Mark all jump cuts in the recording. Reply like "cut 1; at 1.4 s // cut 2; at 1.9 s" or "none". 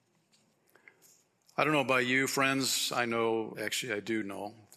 cut 1; at 3.5 s